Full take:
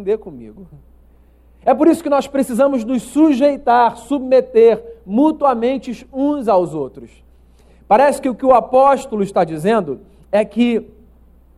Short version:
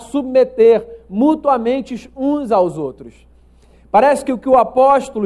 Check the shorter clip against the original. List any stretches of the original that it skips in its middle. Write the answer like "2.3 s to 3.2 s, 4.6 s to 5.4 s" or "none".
none